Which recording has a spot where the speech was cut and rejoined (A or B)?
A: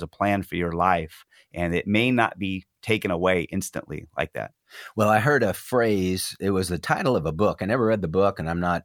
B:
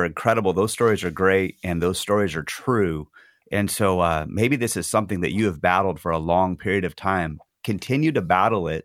B